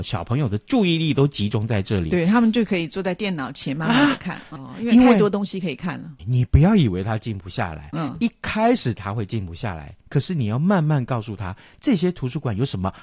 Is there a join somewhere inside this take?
yes; 2 cuts; at 4.6 s, 6.2 s

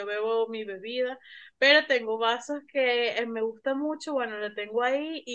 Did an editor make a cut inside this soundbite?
no; 0 cuts

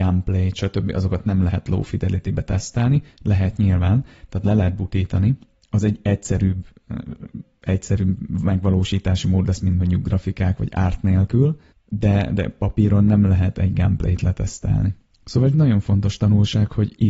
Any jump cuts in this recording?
no; 0 cuts

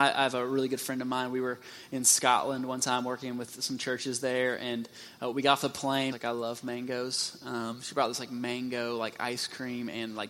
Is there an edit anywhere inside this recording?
yes; 1 cut; at 6.1 s

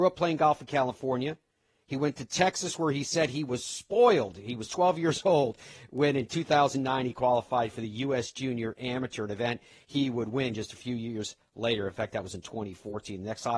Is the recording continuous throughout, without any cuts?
yes; 0 cuts

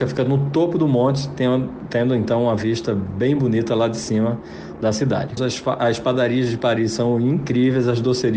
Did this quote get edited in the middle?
yes; 1 cut; at 5.4 s

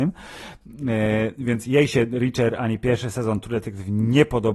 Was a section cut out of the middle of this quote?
no; 0 cuts

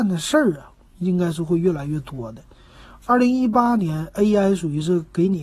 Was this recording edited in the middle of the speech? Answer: no; 0 cuts

